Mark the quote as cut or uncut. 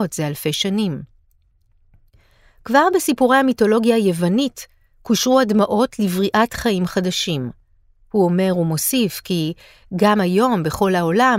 uncut